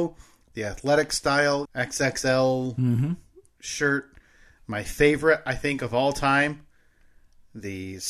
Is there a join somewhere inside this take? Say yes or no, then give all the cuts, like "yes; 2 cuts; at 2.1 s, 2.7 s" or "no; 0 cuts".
yes; 1 cut; at 1.6 s